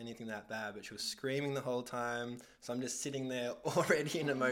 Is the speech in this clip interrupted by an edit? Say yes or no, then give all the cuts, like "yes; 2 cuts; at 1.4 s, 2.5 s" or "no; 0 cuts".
no; 0 cuts